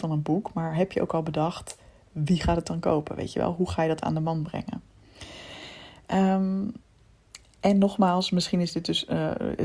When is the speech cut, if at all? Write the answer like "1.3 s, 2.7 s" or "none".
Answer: none